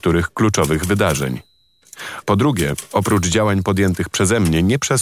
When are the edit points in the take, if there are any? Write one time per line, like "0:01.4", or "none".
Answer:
0:02.2